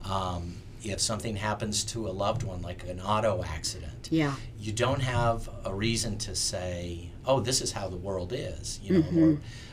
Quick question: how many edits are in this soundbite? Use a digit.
0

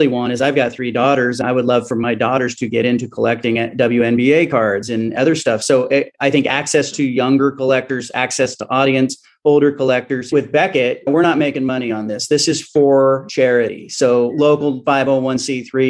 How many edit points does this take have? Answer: 0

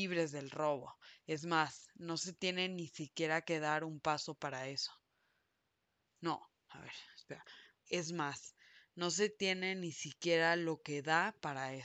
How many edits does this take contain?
1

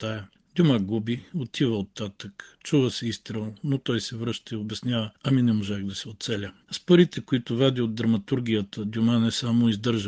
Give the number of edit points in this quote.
1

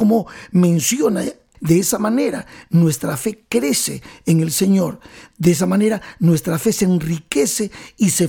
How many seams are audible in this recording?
1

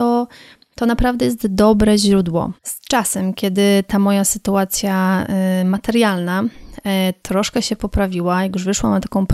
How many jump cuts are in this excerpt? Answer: 1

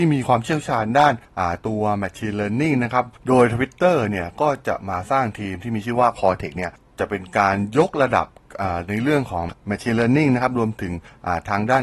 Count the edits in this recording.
1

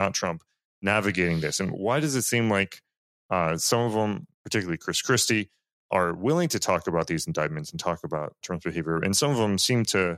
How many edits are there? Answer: 2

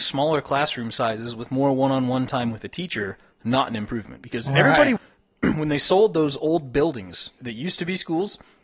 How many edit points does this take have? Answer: 2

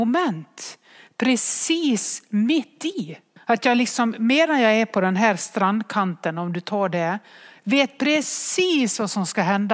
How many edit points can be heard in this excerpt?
1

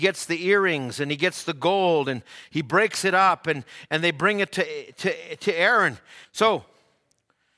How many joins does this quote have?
1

